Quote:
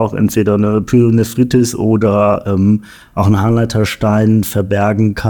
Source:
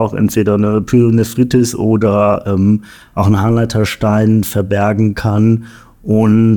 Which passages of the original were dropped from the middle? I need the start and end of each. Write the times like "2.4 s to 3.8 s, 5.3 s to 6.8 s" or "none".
none